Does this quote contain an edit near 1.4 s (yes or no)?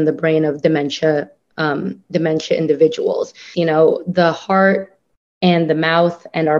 no